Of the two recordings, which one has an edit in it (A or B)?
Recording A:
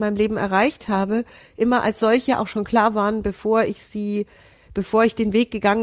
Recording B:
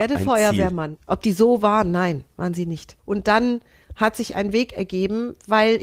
B